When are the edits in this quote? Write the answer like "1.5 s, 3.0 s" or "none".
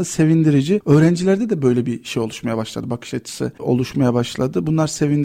none